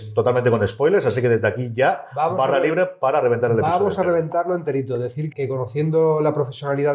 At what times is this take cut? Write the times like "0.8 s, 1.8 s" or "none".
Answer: 5.3 s